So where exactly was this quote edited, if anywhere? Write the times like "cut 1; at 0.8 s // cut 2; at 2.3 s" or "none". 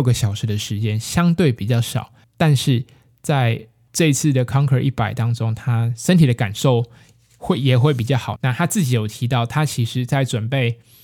cut 1; at 8.3 s